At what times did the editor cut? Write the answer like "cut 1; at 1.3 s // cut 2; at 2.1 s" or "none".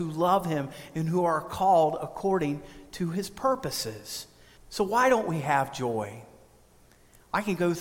cut 1; at 4.6 s